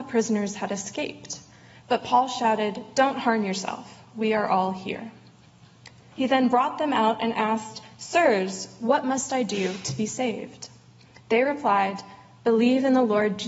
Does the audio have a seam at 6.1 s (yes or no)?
yes